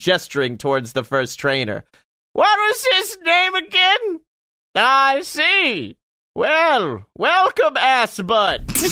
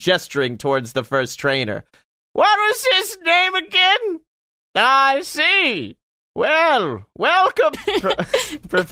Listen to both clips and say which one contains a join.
second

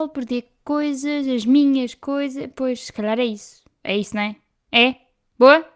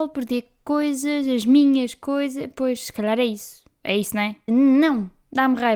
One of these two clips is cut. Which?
second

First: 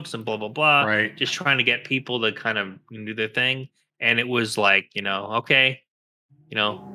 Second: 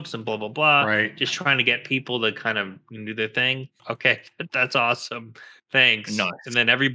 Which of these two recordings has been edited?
second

